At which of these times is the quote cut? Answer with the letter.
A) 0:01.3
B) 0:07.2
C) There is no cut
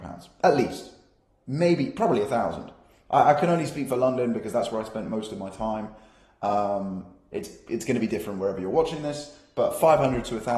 C